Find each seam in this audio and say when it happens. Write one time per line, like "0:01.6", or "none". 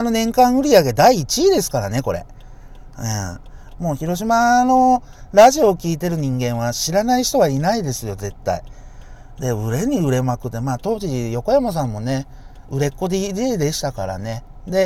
0:03.7